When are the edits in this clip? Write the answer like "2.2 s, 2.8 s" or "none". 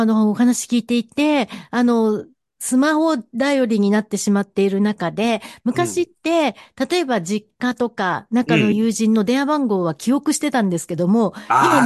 8.7 s